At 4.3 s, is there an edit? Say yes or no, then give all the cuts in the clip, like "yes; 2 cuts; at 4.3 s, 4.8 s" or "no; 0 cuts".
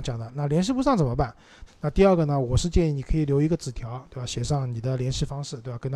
no; 1 cut; at 1.7 s